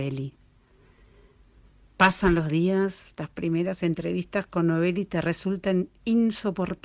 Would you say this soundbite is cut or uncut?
uncut